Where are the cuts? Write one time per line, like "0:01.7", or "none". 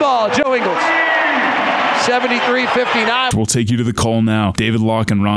0:03.3